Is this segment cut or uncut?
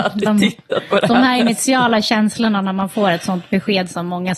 uncut